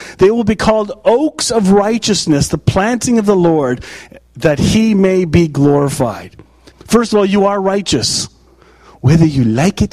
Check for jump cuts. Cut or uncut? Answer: cut